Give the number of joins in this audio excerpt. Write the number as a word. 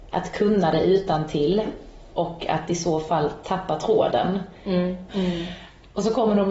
one